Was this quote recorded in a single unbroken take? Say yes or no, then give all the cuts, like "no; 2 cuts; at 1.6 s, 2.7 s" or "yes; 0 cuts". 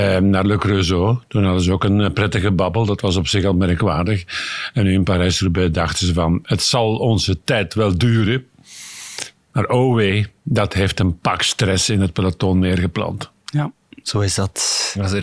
yes; 0 cuts